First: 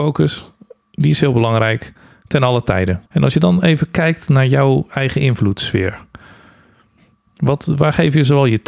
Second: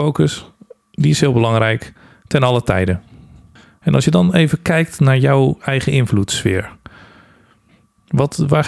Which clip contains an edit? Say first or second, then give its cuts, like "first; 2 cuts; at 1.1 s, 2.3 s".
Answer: first; 1 cut; at 3.1 s